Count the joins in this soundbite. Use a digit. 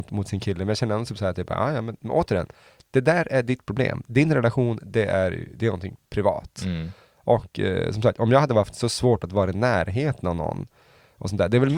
0